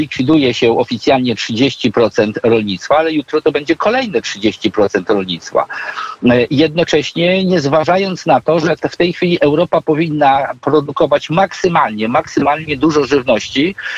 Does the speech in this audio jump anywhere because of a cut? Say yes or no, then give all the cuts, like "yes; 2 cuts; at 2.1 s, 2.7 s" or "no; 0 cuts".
no; 0 cuts